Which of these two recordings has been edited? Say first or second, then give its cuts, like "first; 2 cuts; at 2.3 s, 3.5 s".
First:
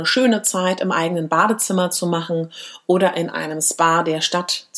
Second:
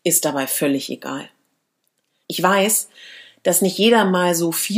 second; 1 cut; at 2.2 s